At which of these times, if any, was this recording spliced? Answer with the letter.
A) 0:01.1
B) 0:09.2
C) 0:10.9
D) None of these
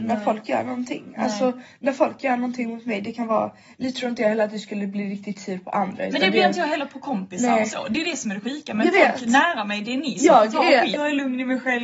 C